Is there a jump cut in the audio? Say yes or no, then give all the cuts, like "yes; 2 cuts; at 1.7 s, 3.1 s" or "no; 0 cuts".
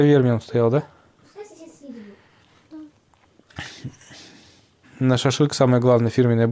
yes; 1 cut; at 4.8 s